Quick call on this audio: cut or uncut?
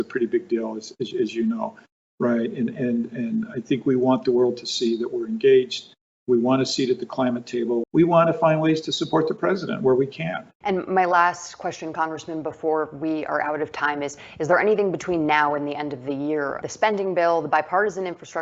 cut